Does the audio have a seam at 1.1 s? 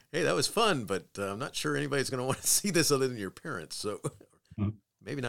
no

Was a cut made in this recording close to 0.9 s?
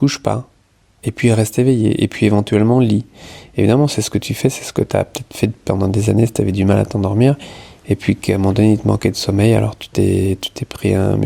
yes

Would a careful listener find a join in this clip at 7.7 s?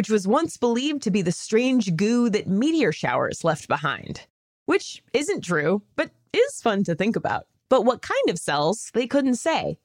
yes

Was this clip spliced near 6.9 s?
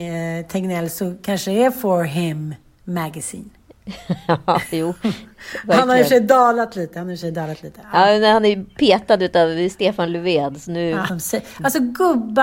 no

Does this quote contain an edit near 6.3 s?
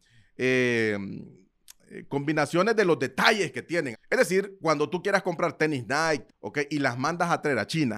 yes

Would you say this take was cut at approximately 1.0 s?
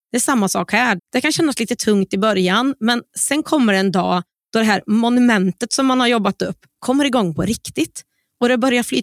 yes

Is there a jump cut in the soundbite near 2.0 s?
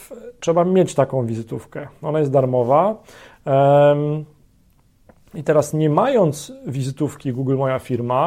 no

